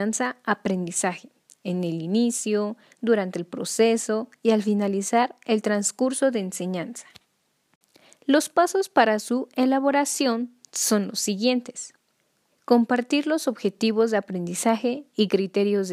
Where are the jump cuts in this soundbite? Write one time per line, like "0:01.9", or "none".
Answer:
0:12.5